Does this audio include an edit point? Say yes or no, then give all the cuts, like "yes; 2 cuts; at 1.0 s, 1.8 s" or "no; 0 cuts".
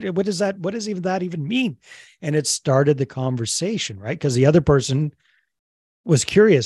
no; 0 cuts